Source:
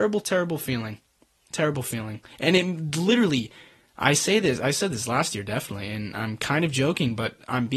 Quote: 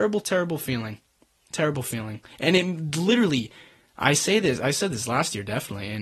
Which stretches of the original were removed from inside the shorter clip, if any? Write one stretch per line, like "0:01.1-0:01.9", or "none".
none